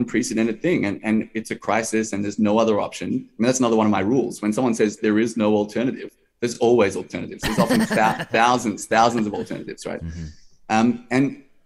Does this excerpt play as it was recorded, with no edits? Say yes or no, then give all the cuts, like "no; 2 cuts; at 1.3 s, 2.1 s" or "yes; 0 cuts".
yes; 0 cuts